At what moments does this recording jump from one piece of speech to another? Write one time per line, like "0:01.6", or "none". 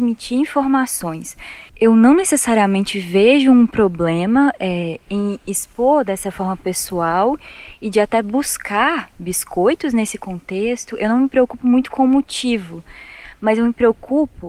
0:01.7